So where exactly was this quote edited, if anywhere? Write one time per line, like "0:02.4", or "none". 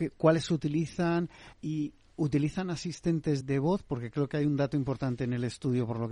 0:01.5
0:03.4